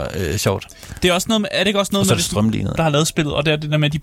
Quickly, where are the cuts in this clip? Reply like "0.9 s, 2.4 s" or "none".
2.8 s